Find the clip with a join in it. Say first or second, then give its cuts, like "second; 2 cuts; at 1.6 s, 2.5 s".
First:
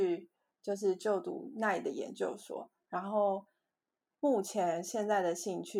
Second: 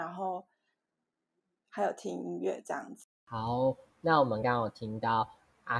second; 1 cut; at 4.4 s